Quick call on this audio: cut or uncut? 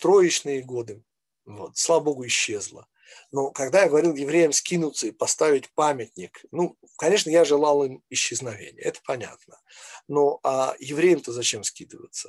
uncut